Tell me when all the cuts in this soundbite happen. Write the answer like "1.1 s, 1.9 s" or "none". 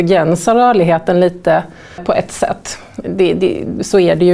2.0 s, 3.0 s

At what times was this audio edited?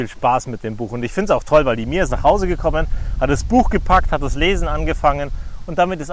none

